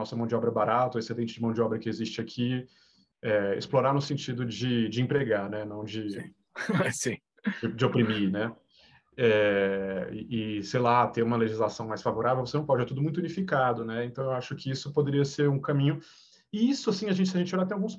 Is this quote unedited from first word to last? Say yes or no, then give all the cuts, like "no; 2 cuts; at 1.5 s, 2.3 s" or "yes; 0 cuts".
yes; 0 cuts